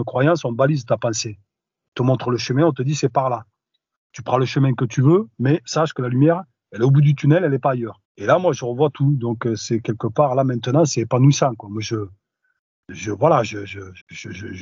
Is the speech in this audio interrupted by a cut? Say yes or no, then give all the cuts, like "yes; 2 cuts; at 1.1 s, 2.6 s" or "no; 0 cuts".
no; 0 cuts